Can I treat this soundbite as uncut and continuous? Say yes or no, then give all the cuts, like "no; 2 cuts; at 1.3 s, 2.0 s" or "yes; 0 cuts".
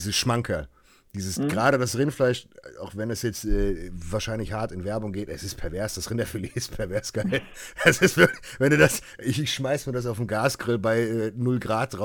yes; 0 cuts